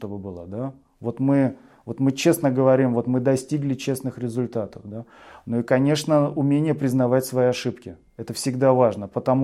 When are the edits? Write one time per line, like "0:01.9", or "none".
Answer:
none